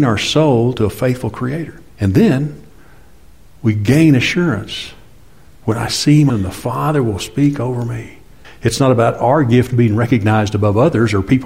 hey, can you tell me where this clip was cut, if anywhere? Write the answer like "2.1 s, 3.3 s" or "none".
1.9 s, 6.3 s, 8.4 s